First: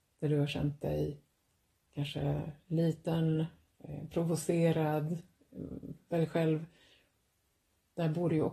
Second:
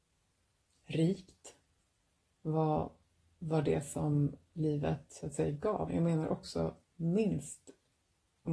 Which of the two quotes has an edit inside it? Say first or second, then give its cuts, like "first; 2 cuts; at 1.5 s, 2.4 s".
second; 1 cut; at 5.9 s